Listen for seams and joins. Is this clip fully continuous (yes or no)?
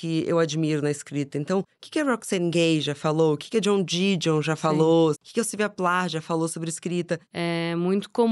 no